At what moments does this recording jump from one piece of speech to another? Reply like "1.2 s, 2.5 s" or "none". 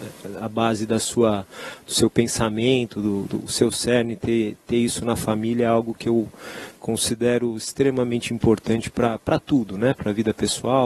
none